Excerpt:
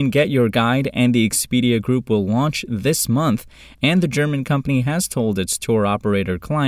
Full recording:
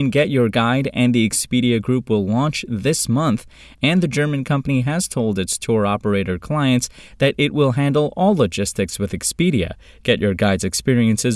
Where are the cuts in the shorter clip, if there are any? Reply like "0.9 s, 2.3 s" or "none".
none